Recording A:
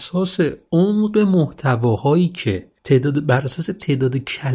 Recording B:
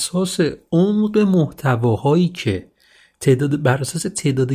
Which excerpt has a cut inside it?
A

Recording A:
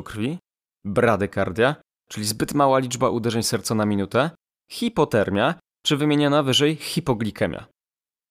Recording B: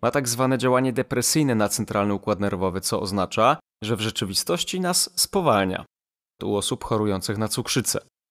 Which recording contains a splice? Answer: B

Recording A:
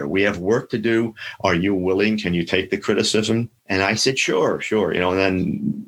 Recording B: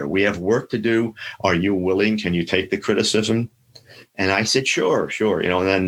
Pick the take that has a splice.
A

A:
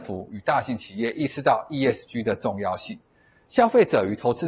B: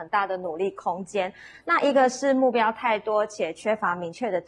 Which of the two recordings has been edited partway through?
B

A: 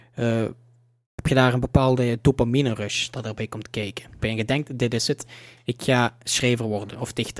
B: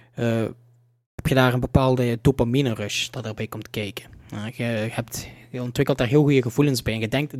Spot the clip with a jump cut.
A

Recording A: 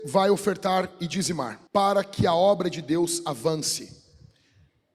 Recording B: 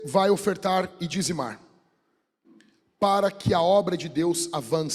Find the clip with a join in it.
A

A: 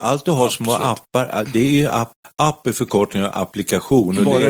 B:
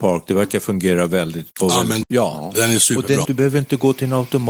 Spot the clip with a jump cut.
B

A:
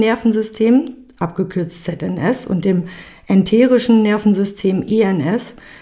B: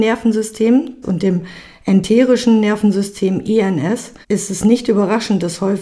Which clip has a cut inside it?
B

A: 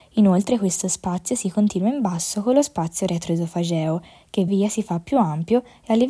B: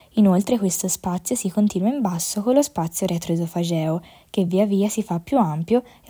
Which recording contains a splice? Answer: A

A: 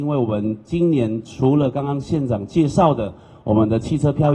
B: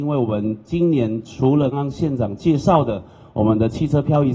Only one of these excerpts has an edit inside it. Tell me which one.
B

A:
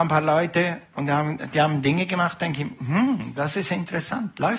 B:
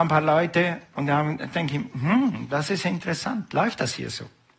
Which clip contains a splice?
B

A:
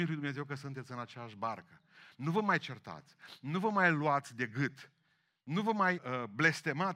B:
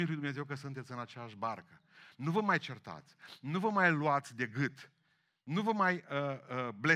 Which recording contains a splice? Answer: A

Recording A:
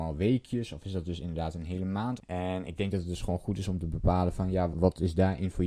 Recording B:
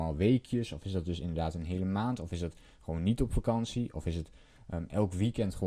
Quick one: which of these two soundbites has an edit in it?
A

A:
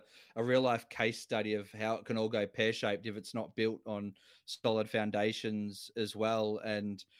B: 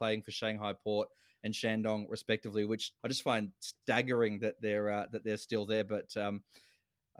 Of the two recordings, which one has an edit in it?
B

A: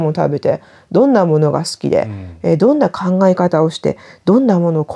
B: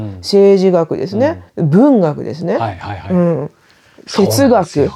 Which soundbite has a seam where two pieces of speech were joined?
B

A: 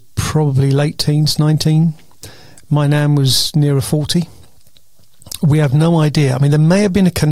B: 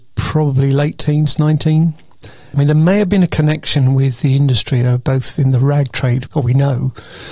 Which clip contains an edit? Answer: B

